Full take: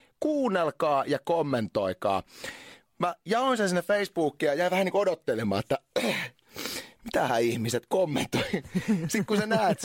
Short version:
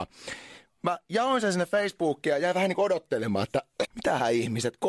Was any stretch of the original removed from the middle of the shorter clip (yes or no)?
yes